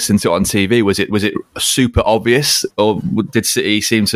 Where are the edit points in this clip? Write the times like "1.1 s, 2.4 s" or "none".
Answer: 2.7 s